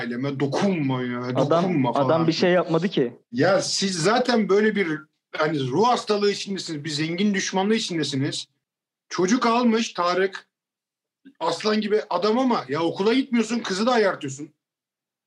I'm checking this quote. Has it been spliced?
no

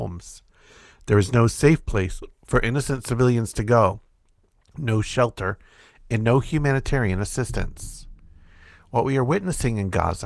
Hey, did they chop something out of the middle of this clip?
no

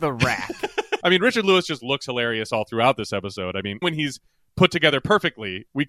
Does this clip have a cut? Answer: yes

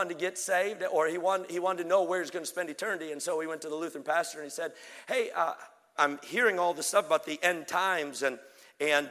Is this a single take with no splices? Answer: no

